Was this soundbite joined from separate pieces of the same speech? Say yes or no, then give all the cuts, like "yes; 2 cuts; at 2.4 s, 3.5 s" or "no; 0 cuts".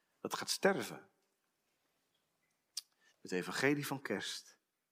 yes; 1 cut; at 3.1 s